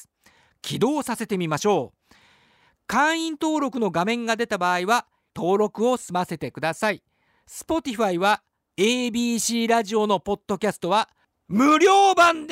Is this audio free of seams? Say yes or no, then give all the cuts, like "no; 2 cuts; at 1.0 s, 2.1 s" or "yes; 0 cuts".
no; 2 cuts; at 5.3 s, 8.7 s